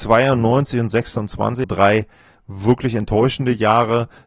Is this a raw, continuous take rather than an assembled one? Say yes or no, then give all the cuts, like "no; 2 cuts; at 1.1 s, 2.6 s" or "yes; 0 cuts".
no; 1 cut; at 1.6 s